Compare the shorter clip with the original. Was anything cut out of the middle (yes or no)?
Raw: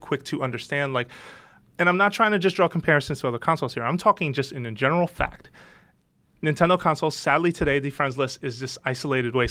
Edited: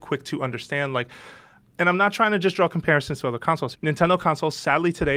yes